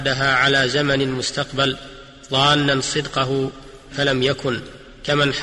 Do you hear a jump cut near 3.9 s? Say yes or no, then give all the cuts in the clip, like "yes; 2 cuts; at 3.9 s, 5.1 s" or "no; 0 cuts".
yes; 1 cut; at 3.9 s